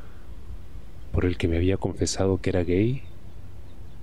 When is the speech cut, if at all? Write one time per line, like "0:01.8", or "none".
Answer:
0:01.1